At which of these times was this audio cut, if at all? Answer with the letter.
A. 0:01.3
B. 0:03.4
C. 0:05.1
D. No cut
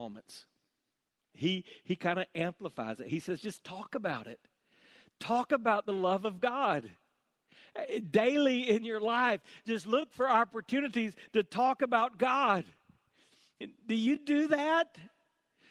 A